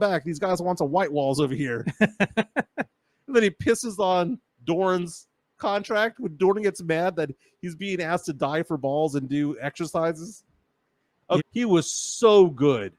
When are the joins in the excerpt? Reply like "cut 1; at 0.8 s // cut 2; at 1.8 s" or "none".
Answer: cut 1; at 11.4 s